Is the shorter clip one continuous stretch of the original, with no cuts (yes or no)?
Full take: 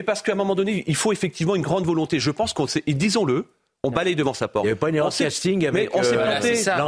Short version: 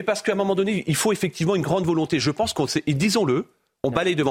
yes